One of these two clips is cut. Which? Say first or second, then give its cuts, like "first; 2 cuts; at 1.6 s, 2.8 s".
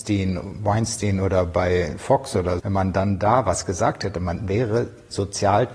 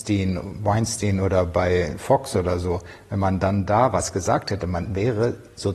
first; 1 cut; at 2.6 s